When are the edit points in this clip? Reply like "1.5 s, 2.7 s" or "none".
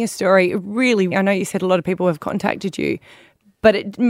1.1 s

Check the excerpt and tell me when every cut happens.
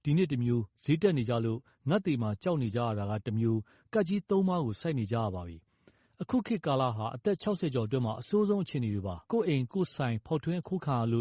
9.2 s

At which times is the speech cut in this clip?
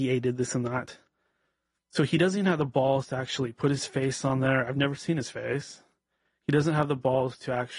none

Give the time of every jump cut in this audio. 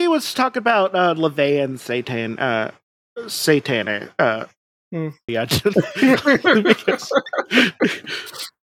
5.3 s

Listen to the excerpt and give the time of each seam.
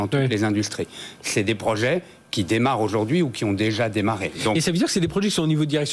none

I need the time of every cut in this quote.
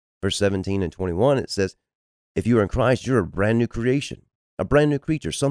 none

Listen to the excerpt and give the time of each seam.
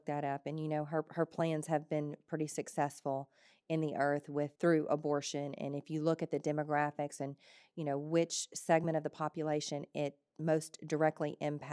4.6 s

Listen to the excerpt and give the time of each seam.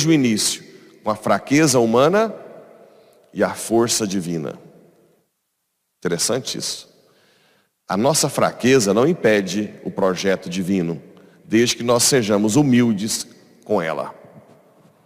none

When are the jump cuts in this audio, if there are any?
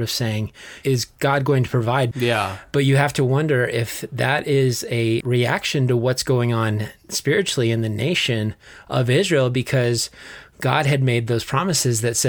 2.1 s, 5.2 s

